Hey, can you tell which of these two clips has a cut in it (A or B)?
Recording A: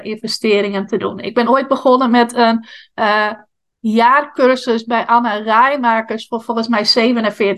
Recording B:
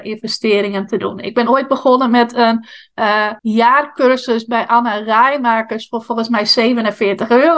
B